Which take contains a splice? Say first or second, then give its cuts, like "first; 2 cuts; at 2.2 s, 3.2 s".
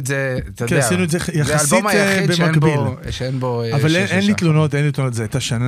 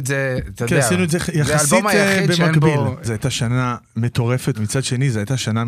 second; 2 cuts; at 3.0 s, 4.5 s